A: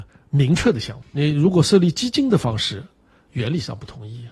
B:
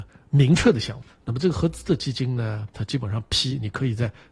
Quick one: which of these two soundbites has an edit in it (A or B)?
B